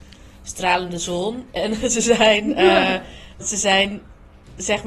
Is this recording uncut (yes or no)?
no